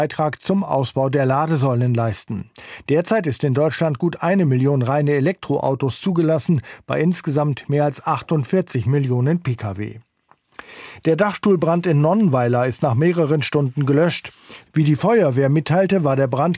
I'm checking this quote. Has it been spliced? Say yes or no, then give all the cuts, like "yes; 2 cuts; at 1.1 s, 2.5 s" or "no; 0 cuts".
no; 0 cuts